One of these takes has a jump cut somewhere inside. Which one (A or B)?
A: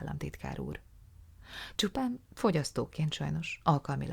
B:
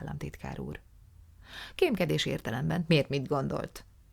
A